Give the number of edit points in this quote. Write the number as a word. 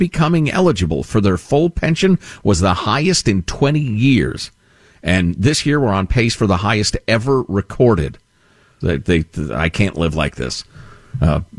one